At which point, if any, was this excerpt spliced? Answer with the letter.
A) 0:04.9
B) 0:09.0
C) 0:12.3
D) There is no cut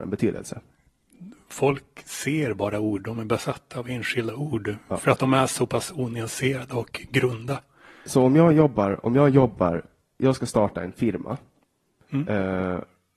D